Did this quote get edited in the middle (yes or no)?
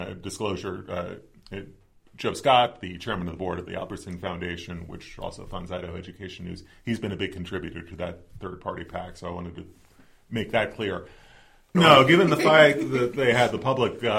yes